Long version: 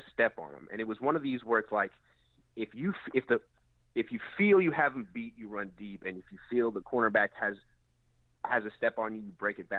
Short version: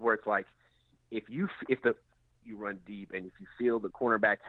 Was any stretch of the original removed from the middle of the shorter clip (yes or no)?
yes